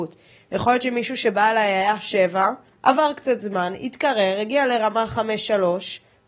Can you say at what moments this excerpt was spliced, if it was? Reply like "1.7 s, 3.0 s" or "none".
2.7 s